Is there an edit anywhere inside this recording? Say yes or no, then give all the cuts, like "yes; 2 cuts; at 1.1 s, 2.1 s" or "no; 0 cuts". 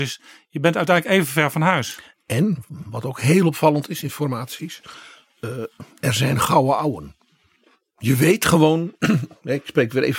no; 0 cuts